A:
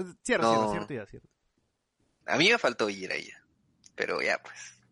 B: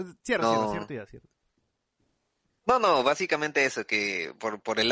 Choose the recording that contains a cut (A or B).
A